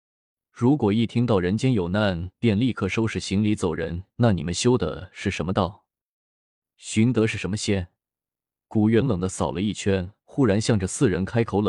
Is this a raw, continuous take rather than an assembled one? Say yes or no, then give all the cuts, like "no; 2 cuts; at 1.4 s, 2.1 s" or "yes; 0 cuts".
no; 1 cut; at 9.0 s